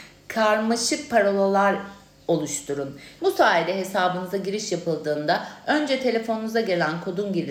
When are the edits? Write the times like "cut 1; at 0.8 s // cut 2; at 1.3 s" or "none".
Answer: cut 1; at 3.2 s